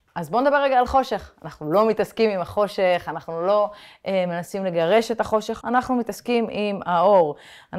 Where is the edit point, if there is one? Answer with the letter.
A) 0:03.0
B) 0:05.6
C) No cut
B